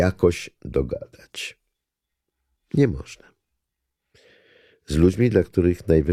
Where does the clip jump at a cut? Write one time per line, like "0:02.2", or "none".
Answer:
none